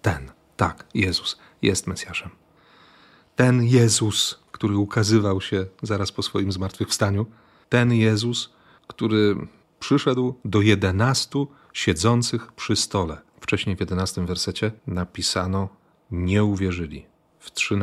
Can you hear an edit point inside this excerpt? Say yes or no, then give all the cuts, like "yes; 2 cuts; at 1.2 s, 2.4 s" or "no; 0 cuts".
yes; 2 cuts; at 13.3 s, 14.8 s